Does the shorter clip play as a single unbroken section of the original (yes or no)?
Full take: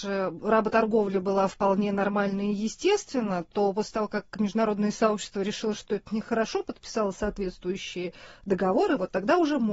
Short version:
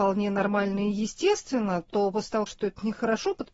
no